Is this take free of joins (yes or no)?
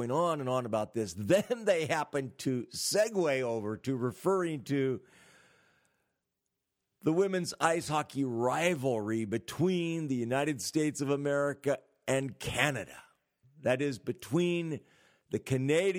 yes